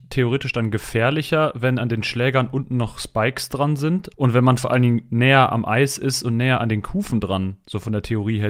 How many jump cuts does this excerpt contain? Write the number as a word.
one